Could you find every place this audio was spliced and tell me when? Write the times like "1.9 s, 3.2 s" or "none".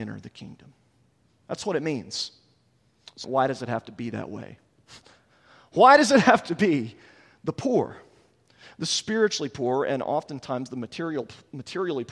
3.2 s